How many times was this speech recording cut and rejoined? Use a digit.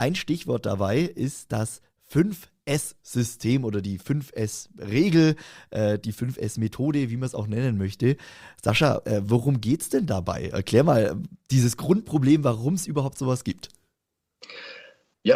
0